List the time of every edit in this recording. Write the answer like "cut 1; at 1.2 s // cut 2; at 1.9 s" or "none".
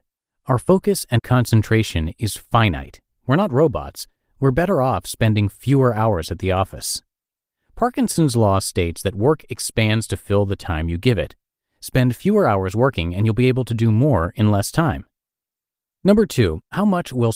none